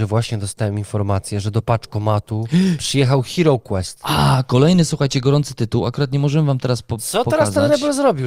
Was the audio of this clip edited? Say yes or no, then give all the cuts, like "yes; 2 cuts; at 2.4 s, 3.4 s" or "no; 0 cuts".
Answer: no; 0 cuts